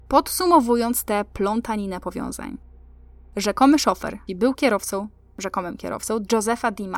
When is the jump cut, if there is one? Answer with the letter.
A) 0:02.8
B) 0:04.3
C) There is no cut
B